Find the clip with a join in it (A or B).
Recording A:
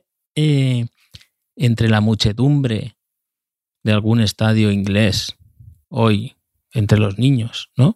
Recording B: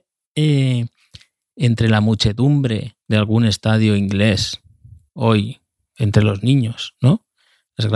B